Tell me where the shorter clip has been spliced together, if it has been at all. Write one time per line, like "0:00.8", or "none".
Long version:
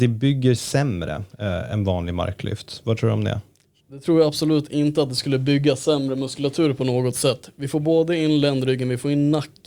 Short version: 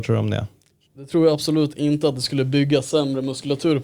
none